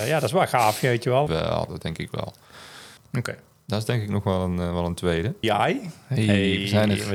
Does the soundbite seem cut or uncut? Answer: cut